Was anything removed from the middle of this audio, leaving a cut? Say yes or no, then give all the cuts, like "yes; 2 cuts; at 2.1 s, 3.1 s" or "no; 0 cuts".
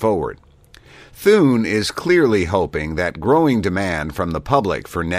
no; 0 cuts